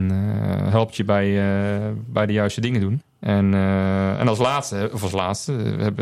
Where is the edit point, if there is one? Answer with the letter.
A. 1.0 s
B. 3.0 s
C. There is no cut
B